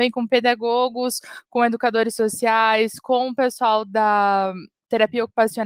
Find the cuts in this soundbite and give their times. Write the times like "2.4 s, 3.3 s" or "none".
none